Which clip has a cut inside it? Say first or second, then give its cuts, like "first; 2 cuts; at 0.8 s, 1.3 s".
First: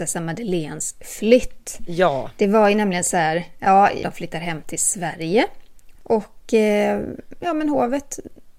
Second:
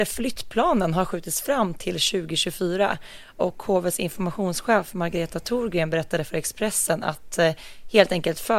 first; 2 cuts; at 4.0 s, 5.9 s